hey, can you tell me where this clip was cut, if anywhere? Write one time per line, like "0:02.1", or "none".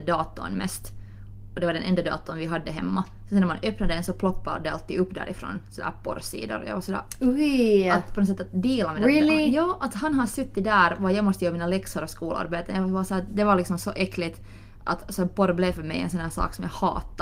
none